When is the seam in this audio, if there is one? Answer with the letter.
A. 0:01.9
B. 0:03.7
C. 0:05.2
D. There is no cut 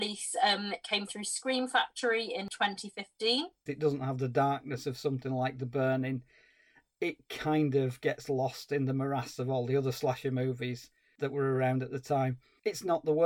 B